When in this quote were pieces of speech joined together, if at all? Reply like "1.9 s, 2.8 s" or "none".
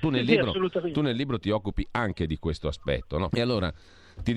3.3 s